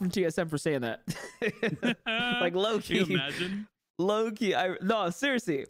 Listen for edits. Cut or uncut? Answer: uncut